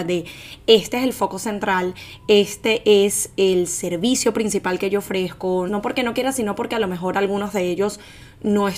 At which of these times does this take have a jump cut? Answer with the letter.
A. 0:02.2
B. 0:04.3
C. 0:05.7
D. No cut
C